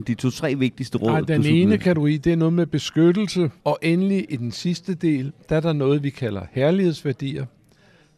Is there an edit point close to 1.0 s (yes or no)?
no